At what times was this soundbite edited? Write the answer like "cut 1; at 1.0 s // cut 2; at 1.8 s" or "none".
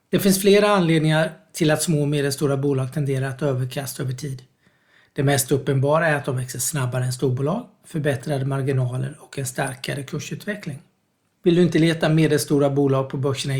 cut 1; at 7.8 s // cut 2; at 11.3 s

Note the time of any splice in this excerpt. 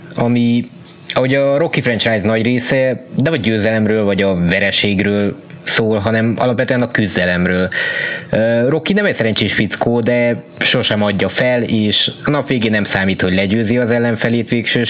cut 1; at 8.3 s

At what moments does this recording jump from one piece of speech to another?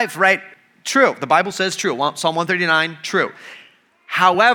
none

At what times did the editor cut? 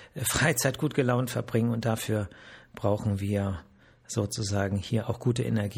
none

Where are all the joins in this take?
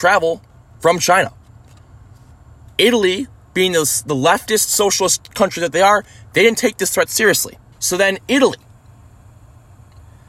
cut 1; at 7.7 s

